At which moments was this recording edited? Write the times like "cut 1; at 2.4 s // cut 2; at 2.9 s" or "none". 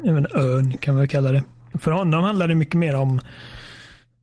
cut 1; at 1.7 s

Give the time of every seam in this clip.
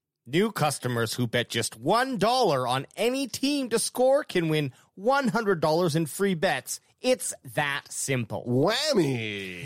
none

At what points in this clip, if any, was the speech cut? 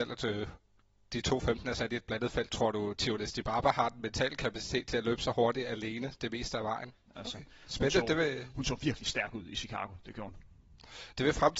cut 1; at 7.1 s

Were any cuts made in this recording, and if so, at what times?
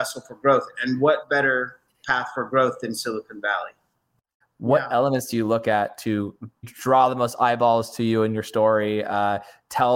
cut 1; at 4.4 s // cut 2; at 6.6 s

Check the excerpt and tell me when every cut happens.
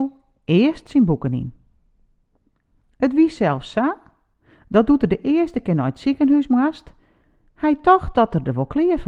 none

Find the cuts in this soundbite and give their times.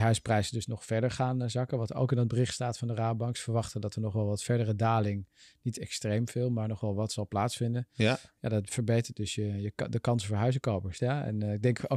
cut 1; at 11.0 s

